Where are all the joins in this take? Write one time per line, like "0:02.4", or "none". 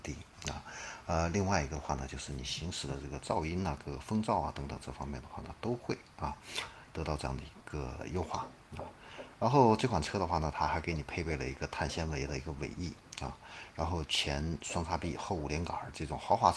none